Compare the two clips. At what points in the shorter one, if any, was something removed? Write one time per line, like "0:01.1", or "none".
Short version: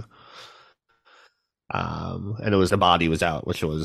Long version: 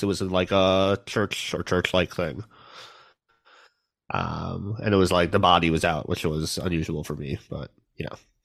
0:02.7